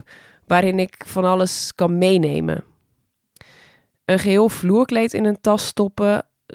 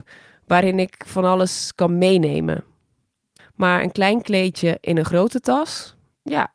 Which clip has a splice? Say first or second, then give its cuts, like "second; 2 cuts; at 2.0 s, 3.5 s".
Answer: second; 1 cut; at 3.4 s